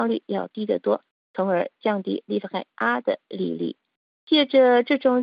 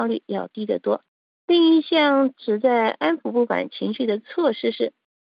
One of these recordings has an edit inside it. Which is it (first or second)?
second